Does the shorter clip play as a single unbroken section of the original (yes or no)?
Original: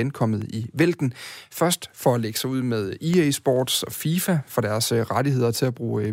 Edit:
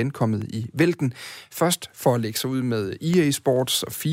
yes